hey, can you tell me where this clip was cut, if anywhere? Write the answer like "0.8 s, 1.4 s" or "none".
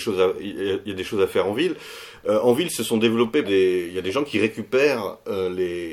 3.4 s